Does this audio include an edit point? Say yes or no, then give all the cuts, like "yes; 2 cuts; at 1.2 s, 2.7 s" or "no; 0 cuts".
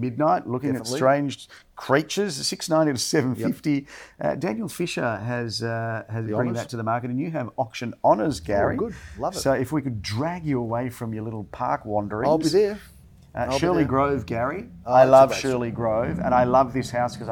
no; 0 cuts